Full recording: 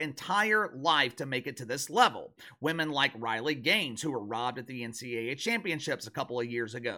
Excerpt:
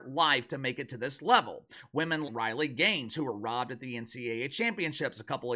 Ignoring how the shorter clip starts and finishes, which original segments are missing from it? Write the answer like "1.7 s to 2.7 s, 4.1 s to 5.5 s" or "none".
2.9 s to 3.1 s